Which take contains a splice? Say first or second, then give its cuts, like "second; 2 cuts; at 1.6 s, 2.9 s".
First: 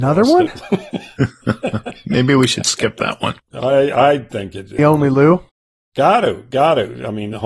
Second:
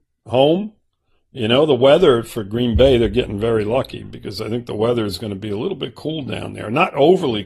first; 2 cuts; at 3.4 s, 4.8 s